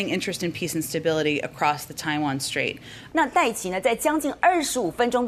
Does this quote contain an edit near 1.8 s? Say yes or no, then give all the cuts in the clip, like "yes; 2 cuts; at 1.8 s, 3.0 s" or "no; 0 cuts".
no; 1 cut; at 3.1 s